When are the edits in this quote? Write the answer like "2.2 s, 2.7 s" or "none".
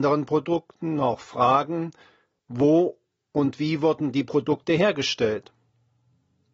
2.4 s